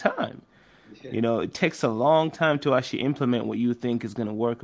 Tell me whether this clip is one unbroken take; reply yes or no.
yes